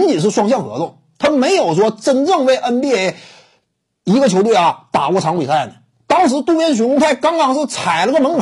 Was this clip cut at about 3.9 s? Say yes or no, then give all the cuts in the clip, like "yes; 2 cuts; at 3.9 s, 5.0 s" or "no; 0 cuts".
no; 0 cuts